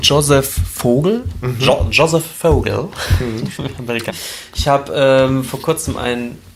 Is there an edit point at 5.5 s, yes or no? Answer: no